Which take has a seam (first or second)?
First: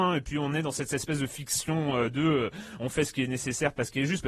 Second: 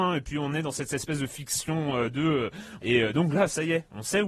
second